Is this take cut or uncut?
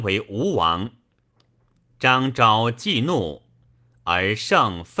cut